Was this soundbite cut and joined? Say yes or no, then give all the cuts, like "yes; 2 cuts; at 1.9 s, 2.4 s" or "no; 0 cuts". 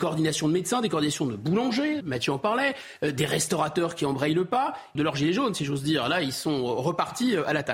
yes; 2 cuts; at 2.0 s, 4.9 s